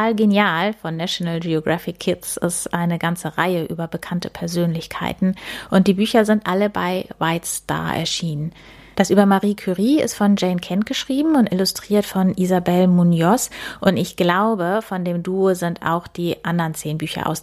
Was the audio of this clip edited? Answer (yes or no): no